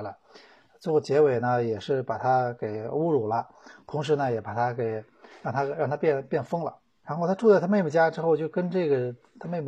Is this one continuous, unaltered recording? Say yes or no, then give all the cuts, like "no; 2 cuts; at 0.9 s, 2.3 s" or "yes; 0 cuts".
no; 1 cut; at 7.0 s